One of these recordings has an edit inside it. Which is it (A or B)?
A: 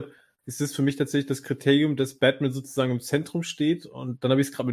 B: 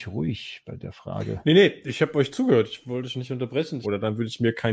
B